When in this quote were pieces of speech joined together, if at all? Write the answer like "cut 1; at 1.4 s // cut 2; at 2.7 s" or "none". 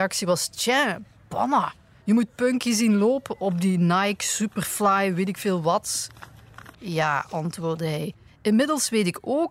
cut 1; at 2.0 s // cut 2; at 6.7 s // cut 3; at 8.3 s